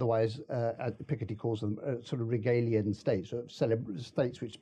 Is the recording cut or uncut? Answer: uncut